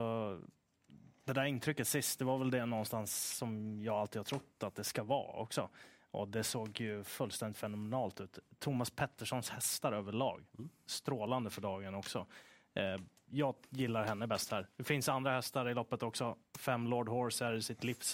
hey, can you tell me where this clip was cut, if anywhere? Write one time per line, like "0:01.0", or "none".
none